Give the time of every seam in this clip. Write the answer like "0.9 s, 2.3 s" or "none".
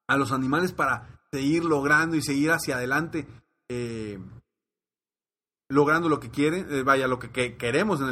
none

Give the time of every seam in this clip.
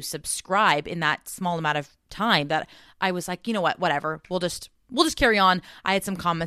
none

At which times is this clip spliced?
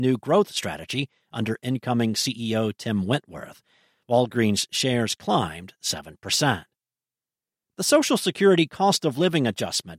7.6 s

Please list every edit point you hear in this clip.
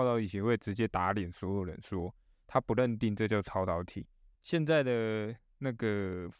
4.3 s

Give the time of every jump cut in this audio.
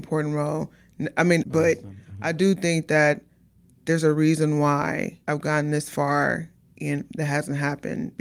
1.4 s, 5.2 s

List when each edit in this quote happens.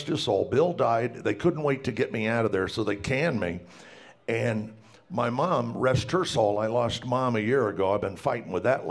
none

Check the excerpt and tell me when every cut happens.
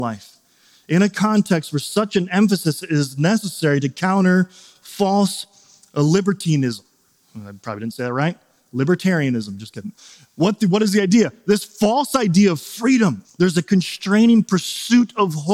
9.9 s, 13.2 s

